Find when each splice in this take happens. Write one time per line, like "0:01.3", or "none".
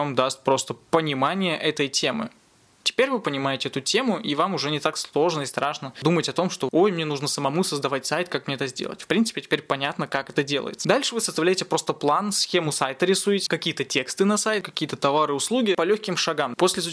0:14.6